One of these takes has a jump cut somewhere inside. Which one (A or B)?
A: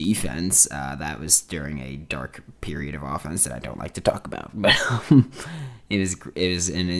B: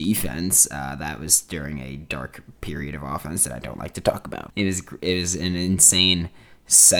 B